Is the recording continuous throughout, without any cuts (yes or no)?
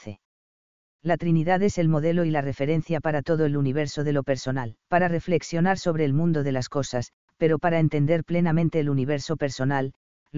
no